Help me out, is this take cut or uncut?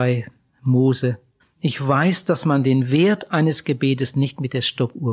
cut